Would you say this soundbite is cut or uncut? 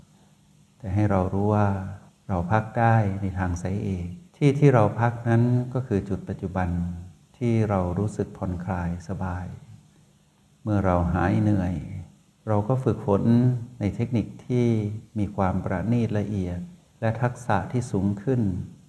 cut